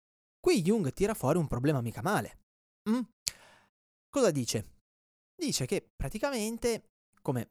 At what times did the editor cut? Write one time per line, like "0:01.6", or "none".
none